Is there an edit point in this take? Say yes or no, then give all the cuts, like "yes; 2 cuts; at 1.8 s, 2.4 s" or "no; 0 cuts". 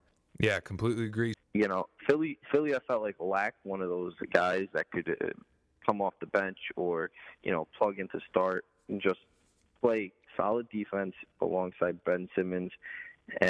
yes; 1 cut; at 1.3 s